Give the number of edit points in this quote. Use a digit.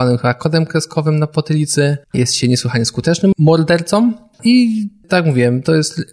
2